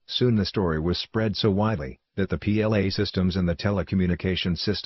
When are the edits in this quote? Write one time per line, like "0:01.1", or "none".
none